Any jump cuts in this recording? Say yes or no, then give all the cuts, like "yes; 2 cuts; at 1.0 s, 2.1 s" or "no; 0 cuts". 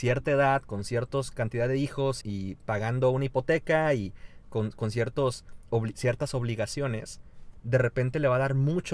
yes; 1 cut; at 2.2 s